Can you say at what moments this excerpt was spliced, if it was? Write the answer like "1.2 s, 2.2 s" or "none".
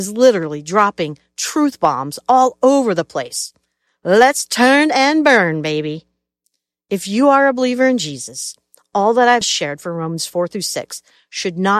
9.4 s